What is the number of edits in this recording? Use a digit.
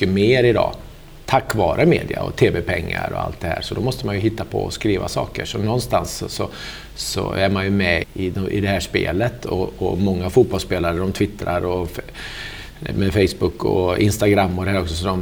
1